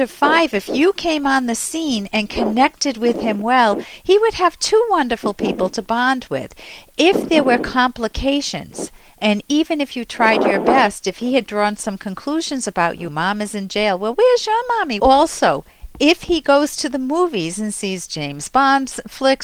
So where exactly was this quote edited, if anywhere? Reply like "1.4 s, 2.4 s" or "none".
13.1 s, 15.0 s